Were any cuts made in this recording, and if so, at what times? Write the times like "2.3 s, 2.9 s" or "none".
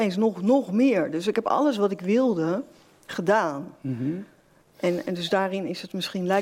none